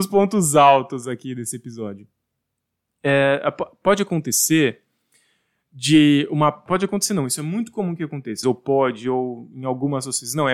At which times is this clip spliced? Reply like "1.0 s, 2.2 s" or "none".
6.7 s, 8.4 s